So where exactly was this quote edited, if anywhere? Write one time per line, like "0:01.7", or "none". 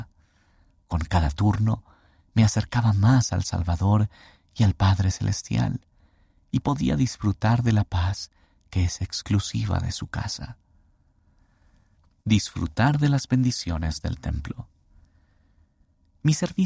none